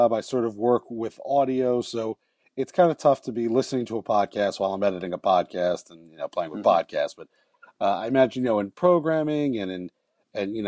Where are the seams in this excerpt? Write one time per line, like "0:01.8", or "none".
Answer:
none